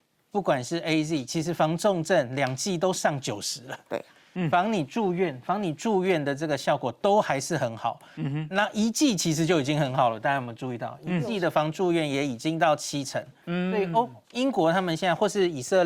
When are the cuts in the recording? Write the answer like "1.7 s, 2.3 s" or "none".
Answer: none